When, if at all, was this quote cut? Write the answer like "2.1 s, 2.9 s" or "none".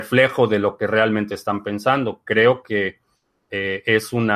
none